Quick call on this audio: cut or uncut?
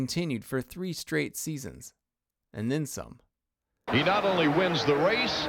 cut